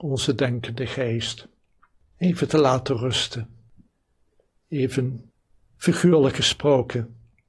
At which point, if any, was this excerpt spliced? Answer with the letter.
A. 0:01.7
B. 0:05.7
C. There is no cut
C